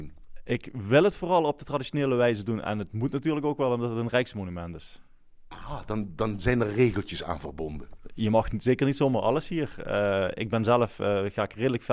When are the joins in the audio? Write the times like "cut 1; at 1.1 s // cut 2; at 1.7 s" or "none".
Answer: none